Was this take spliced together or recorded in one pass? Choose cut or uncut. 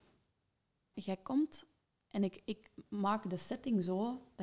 cut